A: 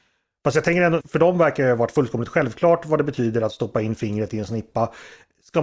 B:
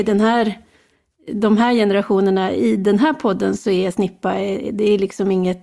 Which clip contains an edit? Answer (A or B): A